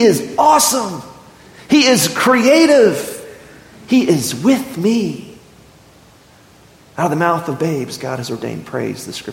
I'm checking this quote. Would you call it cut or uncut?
uncut